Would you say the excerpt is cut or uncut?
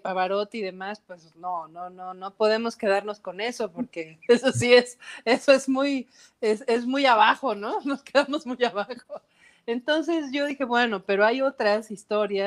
uncut